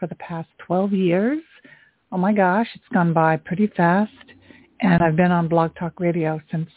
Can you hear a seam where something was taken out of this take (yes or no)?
no